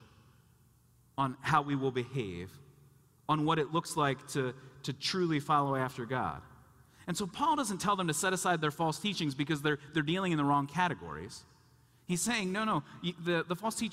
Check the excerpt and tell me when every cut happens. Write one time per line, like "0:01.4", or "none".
none